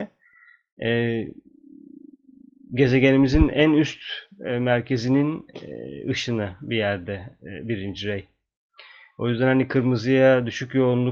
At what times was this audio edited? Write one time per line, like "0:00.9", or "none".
none